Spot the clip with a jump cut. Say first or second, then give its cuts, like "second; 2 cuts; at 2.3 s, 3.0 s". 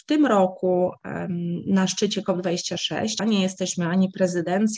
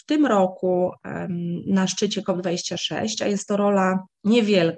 first; 1 cut; at 3.2 s